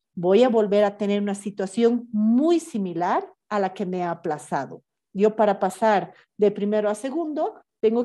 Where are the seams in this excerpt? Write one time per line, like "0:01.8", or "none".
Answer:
0:05.1